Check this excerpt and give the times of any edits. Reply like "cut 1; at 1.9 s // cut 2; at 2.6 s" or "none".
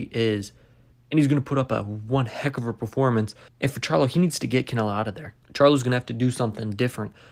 cut 1; at 0.9 s // cut 2; at 5.4 s